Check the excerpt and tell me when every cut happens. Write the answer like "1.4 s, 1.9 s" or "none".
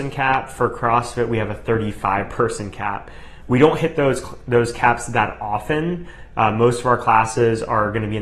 none